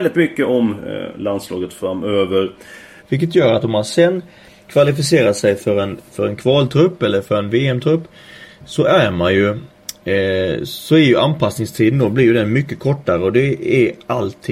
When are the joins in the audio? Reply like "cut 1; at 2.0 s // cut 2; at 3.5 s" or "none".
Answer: cut 1; at 3.0 s